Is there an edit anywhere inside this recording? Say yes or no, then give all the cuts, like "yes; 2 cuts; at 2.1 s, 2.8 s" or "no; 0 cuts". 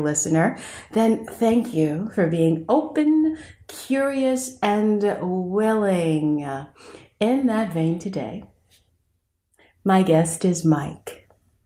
no; 0 cuts